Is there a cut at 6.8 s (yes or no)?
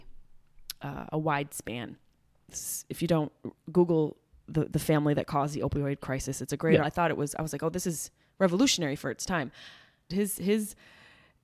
yes